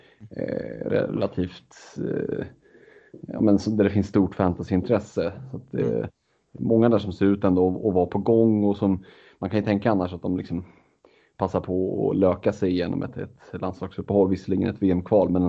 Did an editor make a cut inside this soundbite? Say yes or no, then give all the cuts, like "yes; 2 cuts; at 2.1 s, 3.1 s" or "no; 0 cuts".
no; 0 cuts